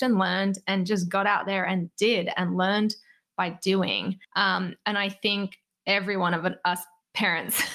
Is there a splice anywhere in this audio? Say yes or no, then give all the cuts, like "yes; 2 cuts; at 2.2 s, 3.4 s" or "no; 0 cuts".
yes; 1 cut; at 4.2 s